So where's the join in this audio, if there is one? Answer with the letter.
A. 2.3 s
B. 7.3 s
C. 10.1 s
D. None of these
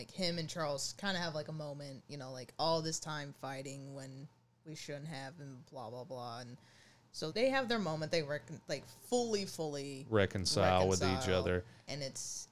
B